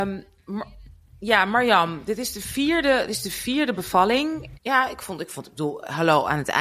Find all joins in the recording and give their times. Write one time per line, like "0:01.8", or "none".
0:04.5